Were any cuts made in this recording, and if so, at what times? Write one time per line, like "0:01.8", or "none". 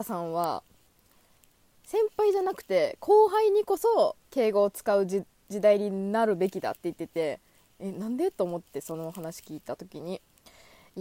0:04.2